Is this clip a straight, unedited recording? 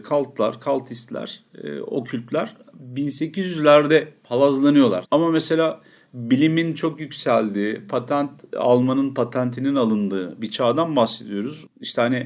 no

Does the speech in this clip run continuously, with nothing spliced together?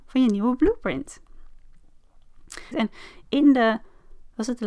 no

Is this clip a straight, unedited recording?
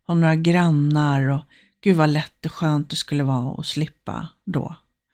yes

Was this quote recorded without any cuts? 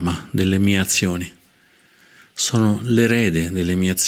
yes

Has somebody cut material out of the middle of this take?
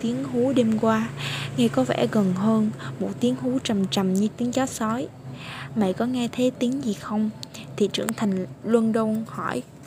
yes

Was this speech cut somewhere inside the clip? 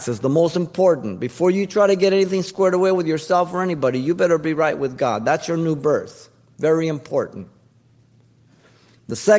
no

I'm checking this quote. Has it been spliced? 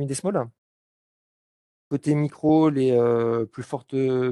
yes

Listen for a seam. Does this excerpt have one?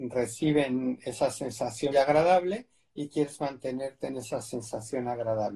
yes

